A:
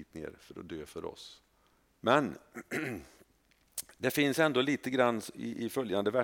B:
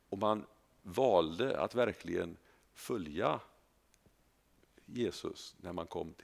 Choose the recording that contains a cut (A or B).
A